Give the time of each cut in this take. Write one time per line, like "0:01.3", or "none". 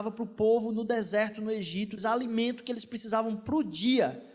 0:02.0